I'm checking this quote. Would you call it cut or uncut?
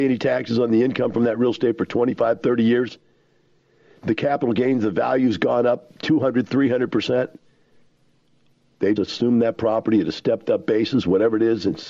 cut